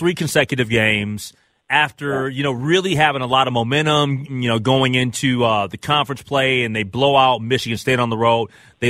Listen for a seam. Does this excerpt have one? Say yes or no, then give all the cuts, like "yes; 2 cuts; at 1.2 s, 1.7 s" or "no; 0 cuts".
no; 0 cuts